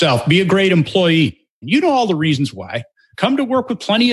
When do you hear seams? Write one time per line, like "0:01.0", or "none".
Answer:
0:01.6
0:03.1